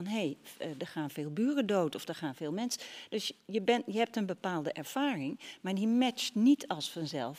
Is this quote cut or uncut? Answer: uncut